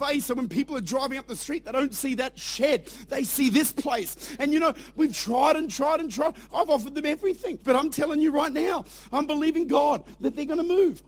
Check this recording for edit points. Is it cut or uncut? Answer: cut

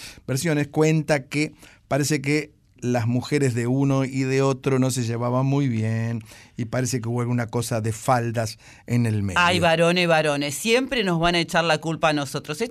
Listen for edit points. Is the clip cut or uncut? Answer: uncut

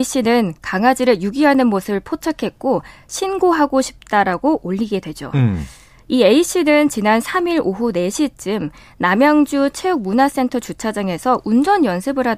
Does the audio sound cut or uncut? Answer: uncut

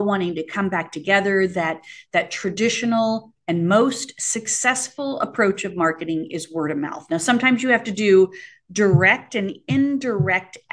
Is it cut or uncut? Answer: uncut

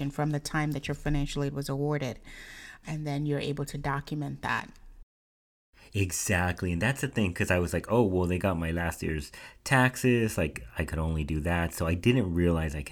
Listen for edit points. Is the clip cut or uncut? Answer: cut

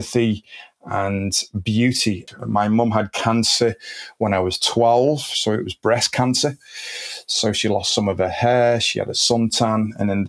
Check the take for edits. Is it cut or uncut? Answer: uncut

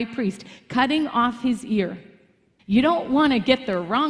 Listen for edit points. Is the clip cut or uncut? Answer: cut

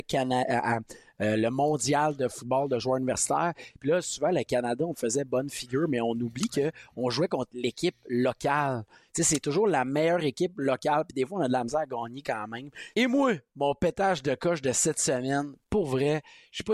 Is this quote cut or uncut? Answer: cut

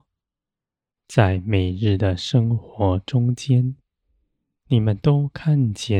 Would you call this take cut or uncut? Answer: uncut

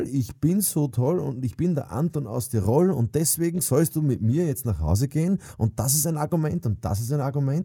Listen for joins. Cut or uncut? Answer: uncut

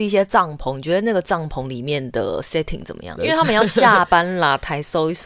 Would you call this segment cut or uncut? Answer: cut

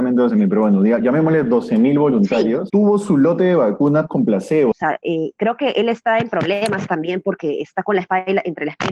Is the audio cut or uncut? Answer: cut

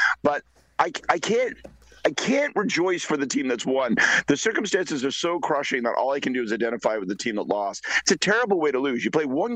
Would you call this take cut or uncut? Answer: uncut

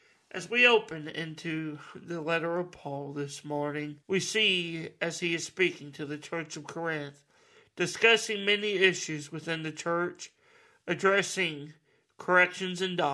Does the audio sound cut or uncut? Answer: cut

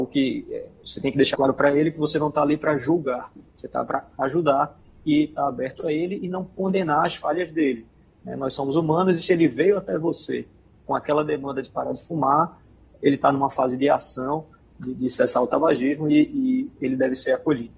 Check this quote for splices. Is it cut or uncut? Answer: cut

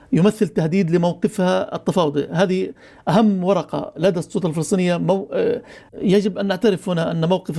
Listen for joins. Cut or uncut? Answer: cut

